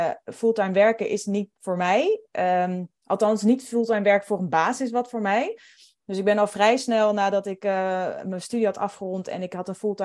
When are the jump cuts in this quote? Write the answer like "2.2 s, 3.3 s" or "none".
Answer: none